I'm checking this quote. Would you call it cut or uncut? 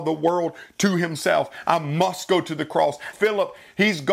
cut